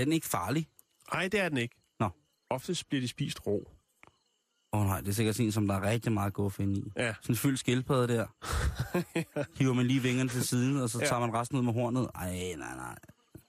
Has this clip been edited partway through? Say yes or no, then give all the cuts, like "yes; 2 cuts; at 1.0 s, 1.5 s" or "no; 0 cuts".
no; 0 cuts